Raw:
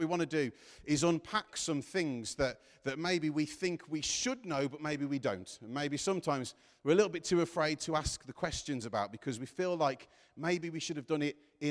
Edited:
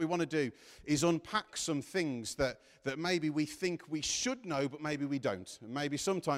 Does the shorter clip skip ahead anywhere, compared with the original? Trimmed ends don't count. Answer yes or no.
no